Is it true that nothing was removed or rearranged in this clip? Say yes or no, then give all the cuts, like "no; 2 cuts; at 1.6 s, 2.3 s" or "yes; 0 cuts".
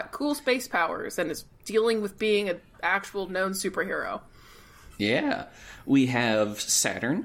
yes; 0 cuts